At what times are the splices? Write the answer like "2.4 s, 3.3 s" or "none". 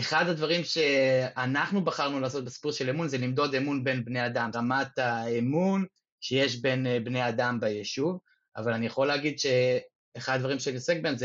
4.5 s